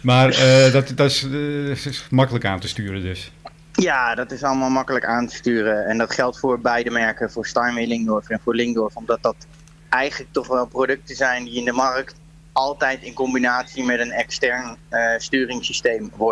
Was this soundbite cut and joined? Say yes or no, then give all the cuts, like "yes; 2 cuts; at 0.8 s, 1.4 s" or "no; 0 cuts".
no; 0 cuts